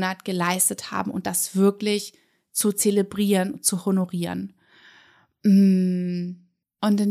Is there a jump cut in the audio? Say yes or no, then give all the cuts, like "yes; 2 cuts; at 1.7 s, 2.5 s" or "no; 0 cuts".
no; 0 cuts